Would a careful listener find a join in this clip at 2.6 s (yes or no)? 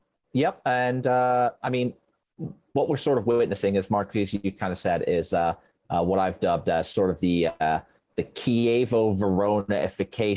no